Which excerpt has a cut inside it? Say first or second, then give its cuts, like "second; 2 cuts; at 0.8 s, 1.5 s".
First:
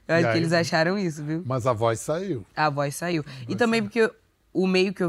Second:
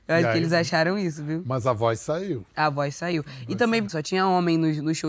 second; 1 cut; at 3.9 s